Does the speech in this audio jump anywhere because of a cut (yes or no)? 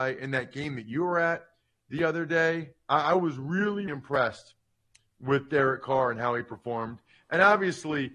yes